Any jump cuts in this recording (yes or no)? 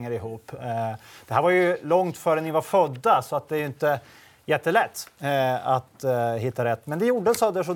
no